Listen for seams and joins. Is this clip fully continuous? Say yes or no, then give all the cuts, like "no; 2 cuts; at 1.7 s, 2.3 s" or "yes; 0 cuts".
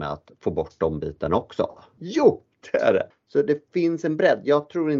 no; 2 cuts; at 2.0 s, 3.1 s